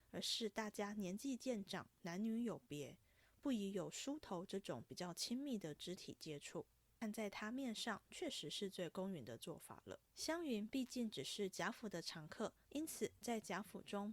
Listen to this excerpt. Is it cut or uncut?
cut